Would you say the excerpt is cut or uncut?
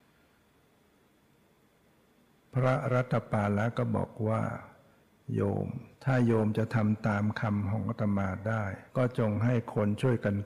cut